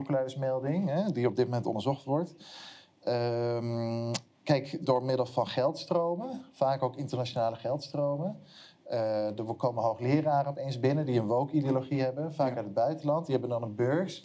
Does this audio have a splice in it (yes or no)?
yes